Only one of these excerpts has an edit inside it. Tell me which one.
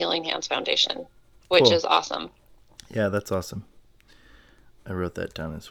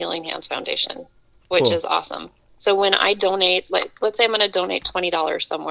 second; 1 cut; at 2.6 s

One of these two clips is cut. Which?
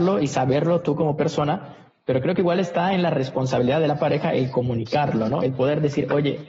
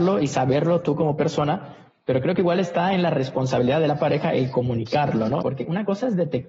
second; 1 cut; at 5.4 s

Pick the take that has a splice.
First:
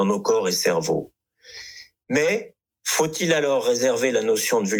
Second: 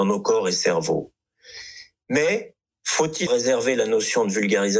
second; 1 cut; at 3.3 s

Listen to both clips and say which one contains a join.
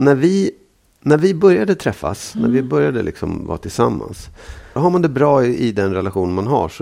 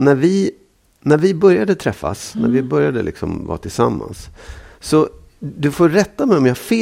first; 1 cut; at 4.8 s

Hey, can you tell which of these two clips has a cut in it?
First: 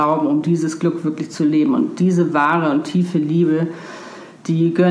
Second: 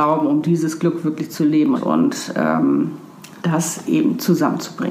second; 2 cuts; at 1.8 s, 3.4 s

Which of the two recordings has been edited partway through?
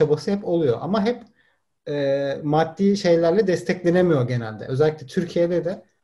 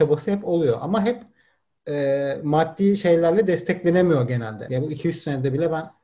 second; 1 cut; at 4.7 s

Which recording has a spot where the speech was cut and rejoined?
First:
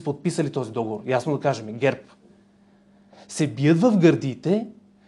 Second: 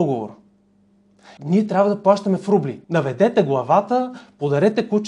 second; 2 cuts; at 1.4 s, 2.8 s

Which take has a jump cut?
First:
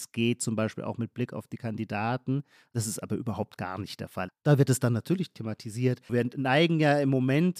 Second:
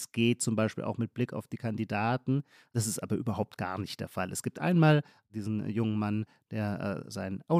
first; 2 cuts; at 4.3 s, 6.1 s

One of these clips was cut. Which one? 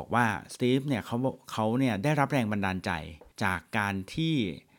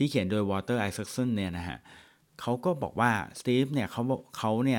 first; 1 cut; at 3.3 s

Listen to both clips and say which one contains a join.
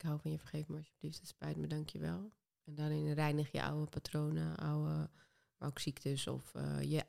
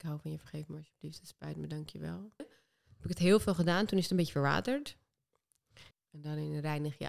second; 2 cuts; at 2.4 s, 5.9 s

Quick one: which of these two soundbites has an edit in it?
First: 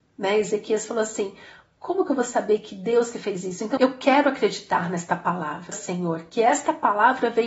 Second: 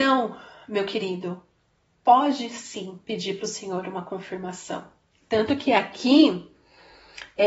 first; 2 cuts; at 3.8 s, 5.7 s

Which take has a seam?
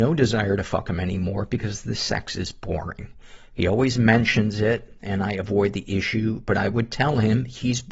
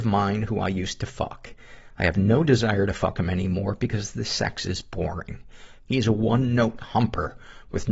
second; 1 cut; at 5.8 s

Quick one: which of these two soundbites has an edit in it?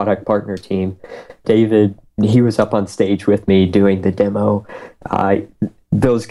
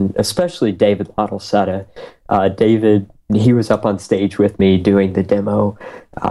first; 1 cut; at 1.4 s

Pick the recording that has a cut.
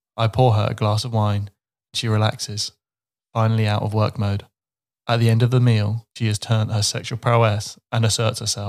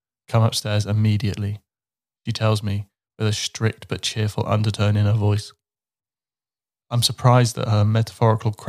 first; 2 cuts; at 4.9 s, 6.1 s

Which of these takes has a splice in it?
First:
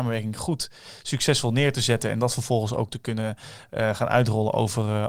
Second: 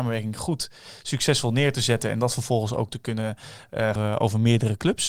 second; 1 cut; at 4.0 s

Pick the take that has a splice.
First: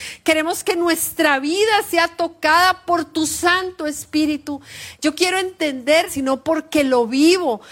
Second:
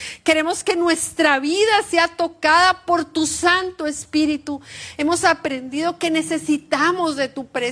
first; 2 cuts; at 4.9 s, 6.1 s

